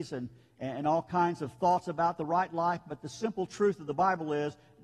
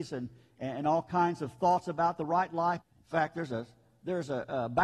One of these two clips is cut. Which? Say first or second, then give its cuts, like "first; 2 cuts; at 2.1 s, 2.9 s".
second; 1 cut; at 2.8 s